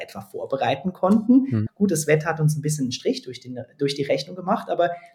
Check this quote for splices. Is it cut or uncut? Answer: cut